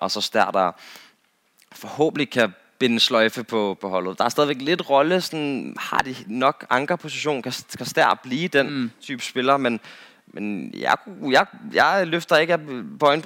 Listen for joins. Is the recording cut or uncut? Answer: cut